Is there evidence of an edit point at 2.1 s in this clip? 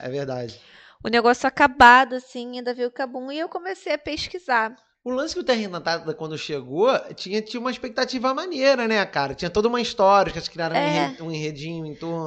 no; 0 cuts

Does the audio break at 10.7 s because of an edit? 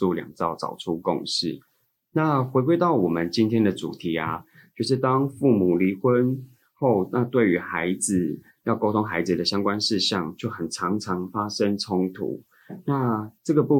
no; 0 cuts

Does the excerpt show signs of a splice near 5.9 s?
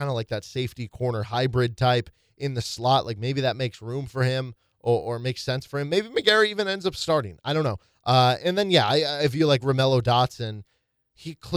no; 0 cuts

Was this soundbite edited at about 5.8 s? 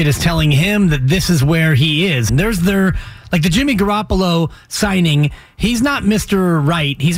no; 1 cut; at 2.3 s

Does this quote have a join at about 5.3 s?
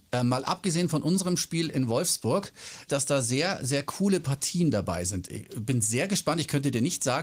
no; 1 cut; at 2.9 s

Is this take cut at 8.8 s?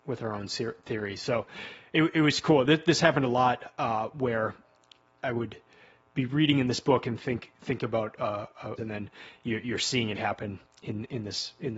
yes; 3 cuts; at 5.2 s, 8.8 s, 10.2 s

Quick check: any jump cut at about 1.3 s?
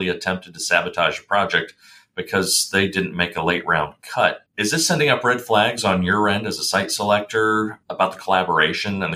no; 2 cuts; at 4.5 s, 7.8 s

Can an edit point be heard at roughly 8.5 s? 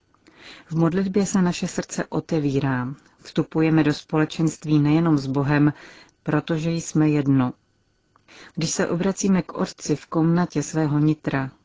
no; 1 cut; at 6.1 s

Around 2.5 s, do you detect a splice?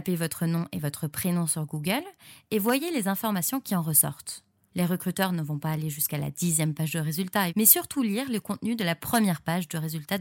no; 2 cuts; at 4.7 s, 7.5 s

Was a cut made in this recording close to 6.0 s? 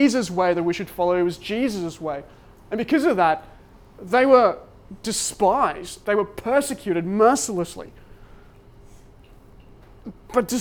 yes; 1 cut; at 6.0 s

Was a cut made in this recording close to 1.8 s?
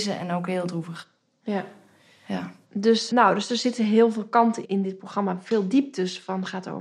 no; 2 cuts; at 3.1 s, 4.6 s

